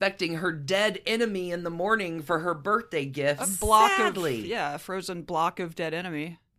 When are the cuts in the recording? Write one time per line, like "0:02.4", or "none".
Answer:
0:03.4